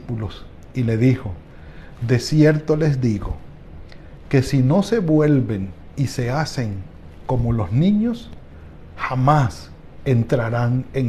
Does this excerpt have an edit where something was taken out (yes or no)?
no